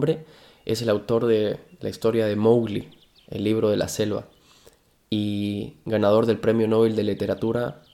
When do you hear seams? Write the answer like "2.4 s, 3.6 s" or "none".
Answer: none